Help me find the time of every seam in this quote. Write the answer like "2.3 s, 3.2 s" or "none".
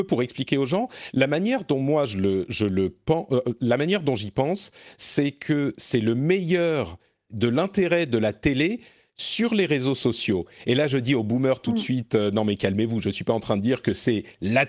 7.3 s